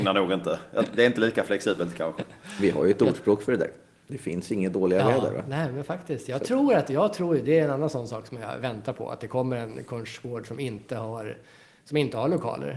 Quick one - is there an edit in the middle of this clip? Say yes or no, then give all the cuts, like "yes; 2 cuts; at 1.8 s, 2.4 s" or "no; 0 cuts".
no; 0 cuts